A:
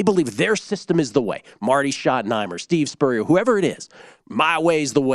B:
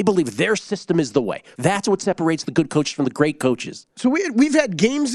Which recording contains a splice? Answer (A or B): B